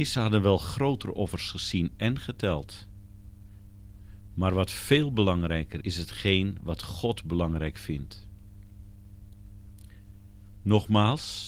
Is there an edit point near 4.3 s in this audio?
no; 2 cuts; at 5.8 s, 10.5 s

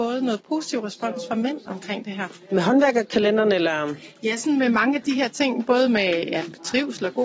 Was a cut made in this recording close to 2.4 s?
no; 0 cuts

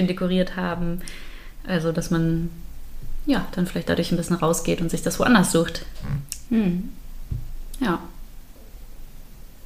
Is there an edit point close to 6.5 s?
yes; 1 cut; at 6.5 s

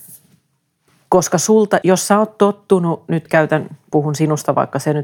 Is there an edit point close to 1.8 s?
yes; 1 cut; at 1.8 s

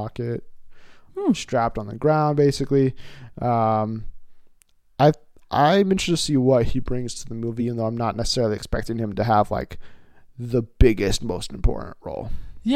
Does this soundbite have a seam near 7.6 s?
no; 0 cuts

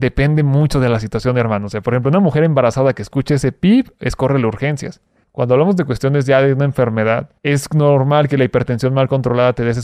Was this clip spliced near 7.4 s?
yes; 2 cuts; at 5.2 s, 7.4 s

